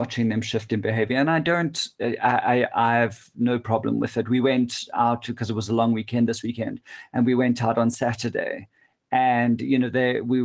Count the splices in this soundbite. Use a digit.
0